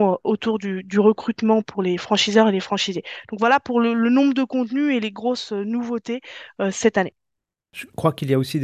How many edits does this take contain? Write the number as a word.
zero